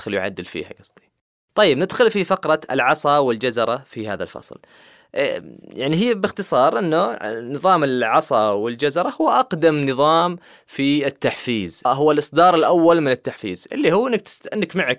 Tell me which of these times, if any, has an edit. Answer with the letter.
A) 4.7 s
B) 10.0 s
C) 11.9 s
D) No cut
C